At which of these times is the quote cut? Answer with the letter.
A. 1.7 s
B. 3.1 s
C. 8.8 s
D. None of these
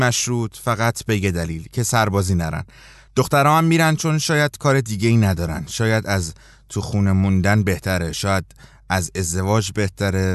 D